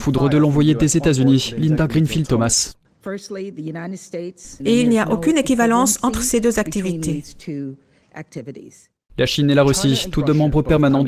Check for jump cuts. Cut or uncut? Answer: cut